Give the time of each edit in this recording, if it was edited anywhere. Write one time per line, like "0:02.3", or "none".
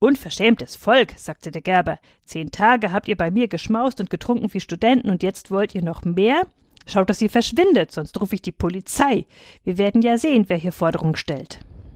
none